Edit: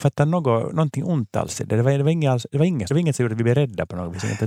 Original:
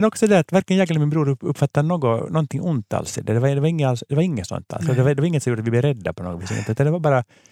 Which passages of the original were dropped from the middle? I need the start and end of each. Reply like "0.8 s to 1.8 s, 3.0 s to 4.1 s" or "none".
4.5 s to 5.2 s